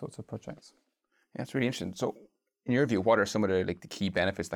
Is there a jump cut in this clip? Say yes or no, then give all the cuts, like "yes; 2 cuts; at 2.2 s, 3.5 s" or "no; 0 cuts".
no; 0 cuts